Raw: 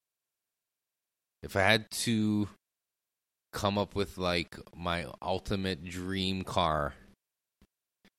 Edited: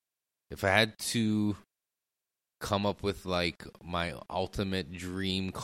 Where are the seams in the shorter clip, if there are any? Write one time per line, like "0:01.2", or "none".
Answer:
none